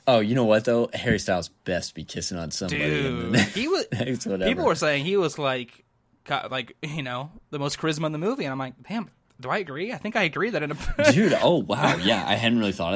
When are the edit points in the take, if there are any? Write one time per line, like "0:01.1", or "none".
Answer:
none